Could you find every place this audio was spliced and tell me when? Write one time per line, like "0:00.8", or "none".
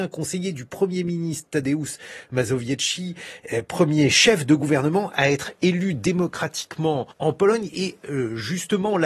0:07.1